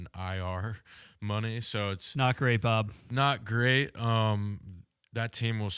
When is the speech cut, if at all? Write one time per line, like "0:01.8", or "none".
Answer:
none